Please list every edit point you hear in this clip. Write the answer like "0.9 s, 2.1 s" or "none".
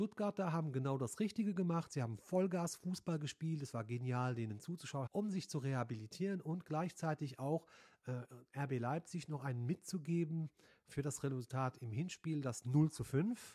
5.1 s